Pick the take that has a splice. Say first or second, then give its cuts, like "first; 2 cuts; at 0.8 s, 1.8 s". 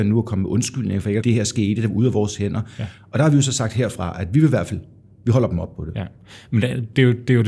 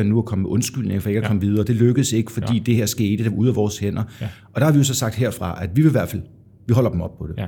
first; 1 cut; at 1.2 s